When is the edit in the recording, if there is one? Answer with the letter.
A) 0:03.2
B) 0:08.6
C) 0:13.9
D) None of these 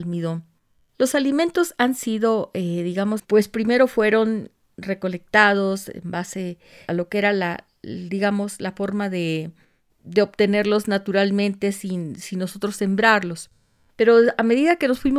A